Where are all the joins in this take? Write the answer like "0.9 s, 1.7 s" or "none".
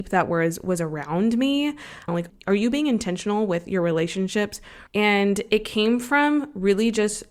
2.1 s, 4.9 s